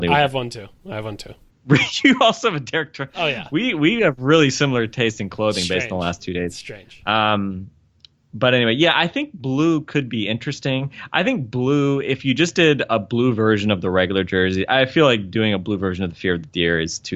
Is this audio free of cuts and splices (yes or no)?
yes